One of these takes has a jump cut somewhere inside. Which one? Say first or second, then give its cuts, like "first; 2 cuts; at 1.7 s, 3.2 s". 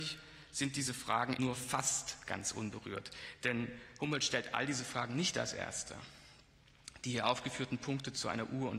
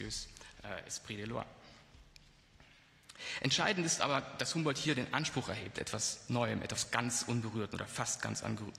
first; 1 cut; at 1.4 s